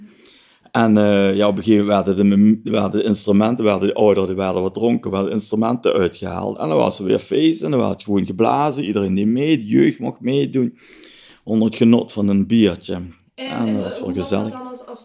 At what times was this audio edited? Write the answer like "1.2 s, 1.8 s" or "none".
none